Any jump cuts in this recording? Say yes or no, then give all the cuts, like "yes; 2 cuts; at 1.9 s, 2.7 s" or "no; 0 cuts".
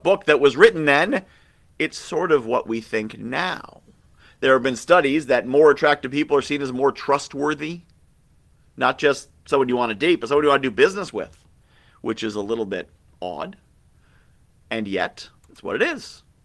yes; 1 cut; at 15.4 s